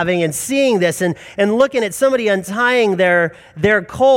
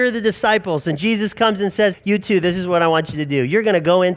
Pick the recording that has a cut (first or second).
second